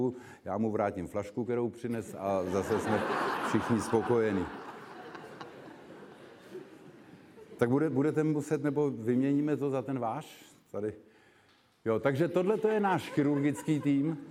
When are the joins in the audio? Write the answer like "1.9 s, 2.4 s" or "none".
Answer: none